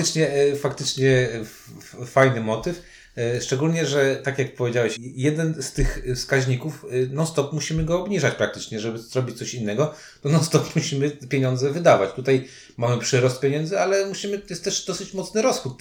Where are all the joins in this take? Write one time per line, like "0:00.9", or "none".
0:05.0